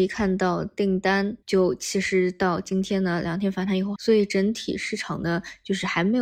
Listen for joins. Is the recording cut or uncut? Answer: cut